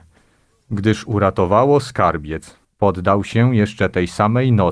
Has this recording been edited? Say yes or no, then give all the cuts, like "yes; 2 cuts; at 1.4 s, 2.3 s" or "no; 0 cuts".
yes; 1 cut; at 2.6 s